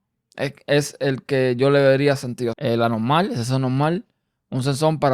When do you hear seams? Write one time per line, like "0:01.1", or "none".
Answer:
0:02.5